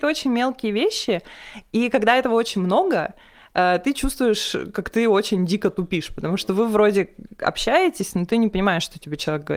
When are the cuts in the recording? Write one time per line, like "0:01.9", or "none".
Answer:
none